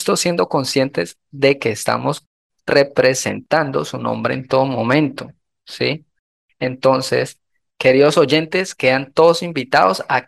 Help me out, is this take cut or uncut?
uncut